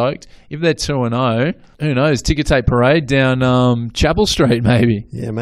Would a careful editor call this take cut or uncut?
uncut